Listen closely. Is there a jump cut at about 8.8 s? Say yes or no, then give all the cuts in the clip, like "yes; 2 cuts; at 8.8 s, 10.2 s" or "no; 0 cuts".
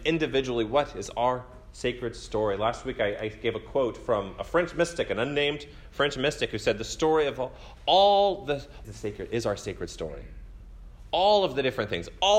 yes; 1 cut; at 8.8 s